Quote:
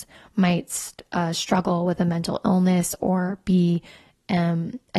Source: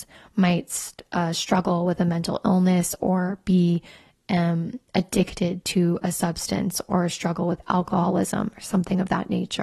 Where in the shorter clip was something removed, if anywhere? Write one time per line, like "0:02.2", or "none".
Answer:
none